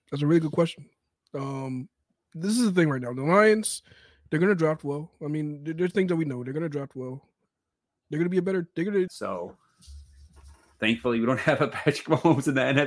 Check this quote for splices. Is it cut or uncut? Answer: cut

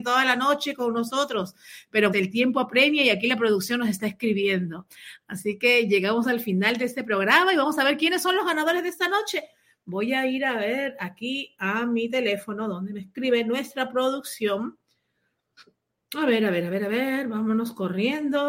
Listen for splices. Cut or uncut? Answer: cut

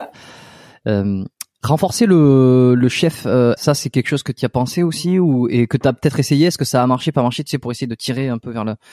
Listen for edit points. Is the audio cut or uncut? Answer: cut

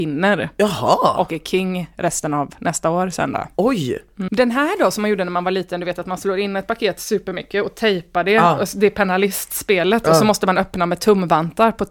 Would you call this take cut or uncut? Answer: cut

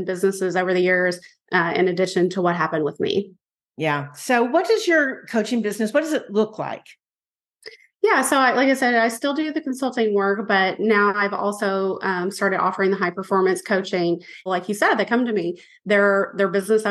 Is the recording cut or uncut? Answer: cut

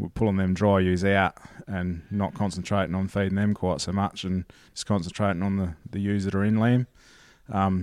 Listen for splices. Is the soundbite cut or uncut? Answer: uncut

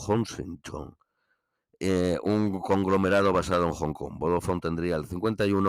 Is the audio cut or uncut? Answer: uncut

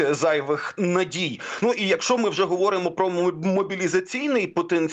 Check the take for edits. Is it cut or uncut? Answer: uncut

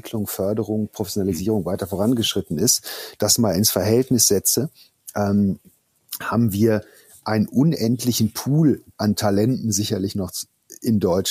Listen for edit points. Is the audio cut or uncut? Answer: uncut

